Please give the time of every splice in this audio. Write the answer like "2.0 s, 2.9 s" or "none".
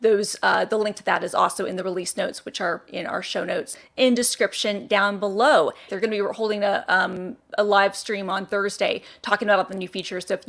5.9 s, 7.4 s